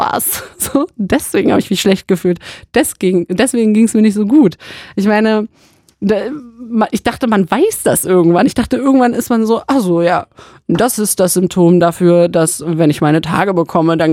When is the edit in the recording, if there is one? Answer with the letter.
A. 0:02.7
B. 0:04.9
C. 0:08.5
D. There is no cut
D